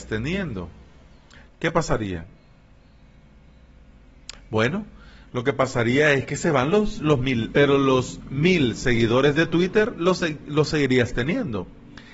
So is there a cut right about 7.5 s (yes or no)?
yes